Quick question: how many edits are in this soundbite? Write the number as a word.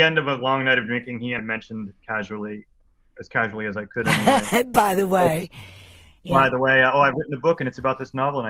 one